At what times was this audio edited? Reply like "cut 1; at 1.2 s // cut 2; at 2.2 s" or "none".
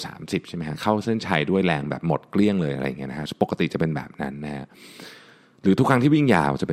none